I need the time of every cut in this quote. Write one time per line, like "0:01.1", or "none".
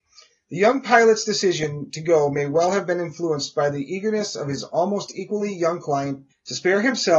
0:06.3